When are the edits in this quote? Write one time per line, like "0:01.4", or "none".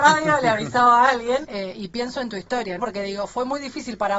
0:01.4
0:02.8

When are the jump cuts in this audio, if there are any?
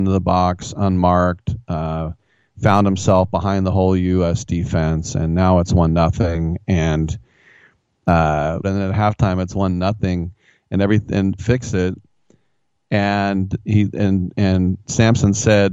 0:08.6
0:11.4

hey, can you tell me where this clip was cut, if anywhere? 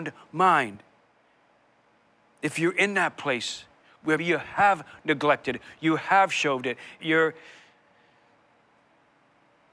0:04.2
0:07.0

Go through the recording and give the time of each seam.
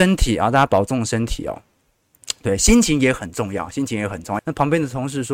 0:04.4

